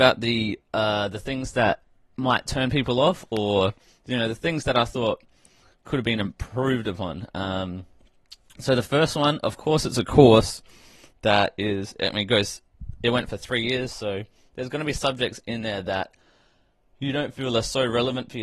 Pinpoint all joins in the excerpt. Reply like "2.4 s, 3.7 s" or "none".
none

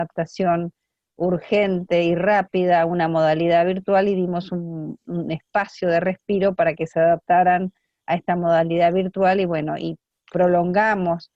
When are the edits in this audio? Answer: 5.0 s

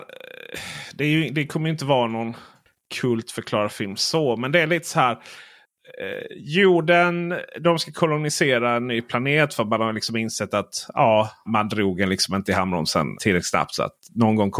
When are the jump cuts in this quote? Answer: 11.5 s, 13.2 s

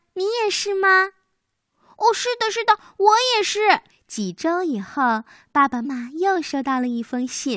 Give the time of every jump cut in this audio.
3.9 s, 5.8 s

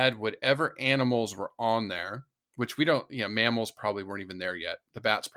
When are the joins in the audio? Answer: none

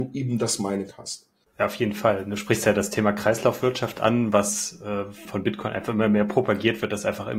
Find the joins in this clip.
1.4 s, 5.3 s

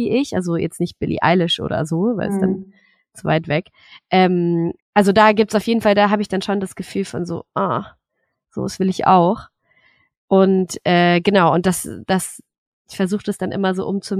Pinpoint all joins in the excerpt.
4.8 s

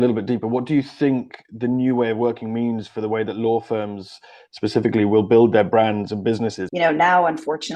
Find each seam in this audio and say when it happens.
6.7 s

